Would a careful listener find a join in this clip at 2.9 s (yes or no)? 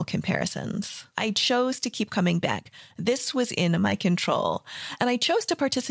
no